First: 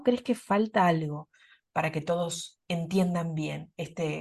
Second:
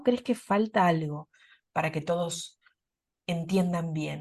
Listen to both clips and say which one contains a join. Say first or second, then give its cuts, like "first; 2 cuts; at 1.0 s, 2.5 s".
first; 1 cut; at 2.6 s